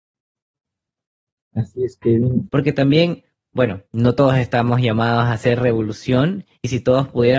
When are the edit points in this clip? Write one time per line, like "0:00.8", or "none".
0:02.5
0:03.9